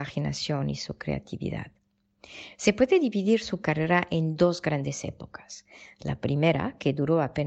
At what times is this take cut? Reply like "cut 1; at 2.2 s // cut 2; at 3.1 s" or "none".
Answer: none